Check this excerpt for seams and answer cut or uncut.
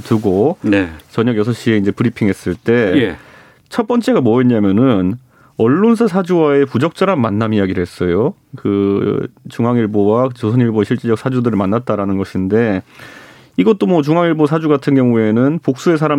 uncut